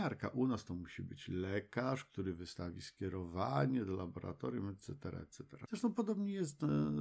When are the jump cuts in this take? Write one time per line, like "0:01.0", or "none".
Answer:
0:05.7